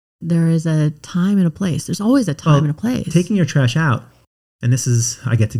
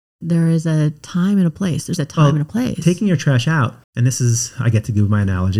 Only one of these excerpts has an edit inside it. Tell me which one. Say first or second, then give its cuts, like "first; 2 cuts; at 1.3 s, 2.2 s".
second; 2 cuts; at 2.0 s, 3.8 s